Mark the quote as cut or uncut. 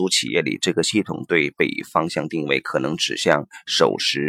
cut